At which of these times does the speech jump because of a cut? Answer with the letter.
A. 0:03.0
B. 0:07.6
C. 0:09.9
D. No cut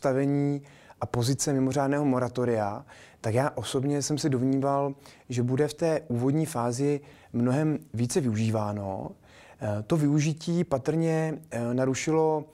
D